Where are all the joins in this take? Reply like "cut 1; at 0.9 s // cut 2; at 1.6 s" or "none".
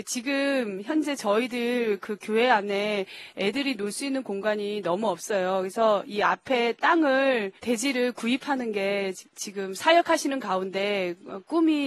cut 1; at 7.6 s